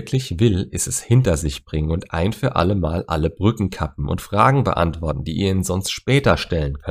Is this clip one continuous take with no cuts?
yes; 0 cuts

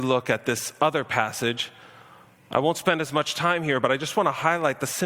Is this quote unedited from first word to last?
yes; 0 cuts

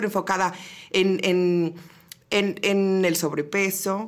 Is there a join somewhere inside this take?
yes; 1 cut; at 2.2 s

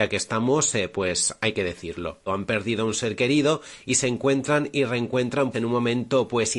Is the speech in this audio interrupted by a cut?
yes; 2 cuts; at 2.3 s, 5.5 s

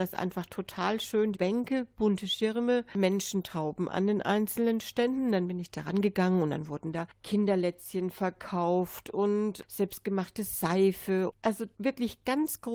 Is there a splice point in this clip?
yes; 1 cut; at 1.3 s

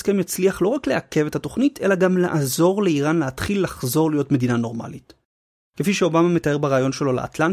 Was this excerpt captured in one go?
no; 1 cut; at 5.7 s

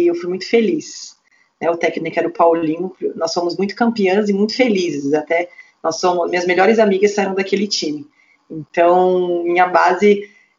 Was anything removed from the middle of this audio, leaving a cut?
no; 0 cuts

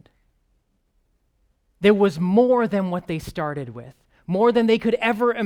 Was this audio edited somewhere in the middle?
no; 0 cuts

